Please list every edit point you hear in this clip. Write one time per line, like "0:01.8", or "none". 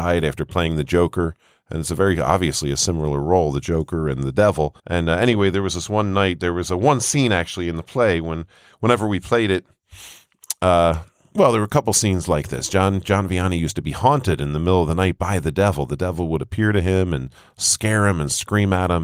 0:04.8